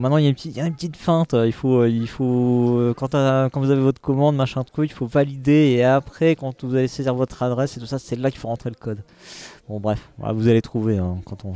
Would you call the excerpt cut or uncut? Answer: uncut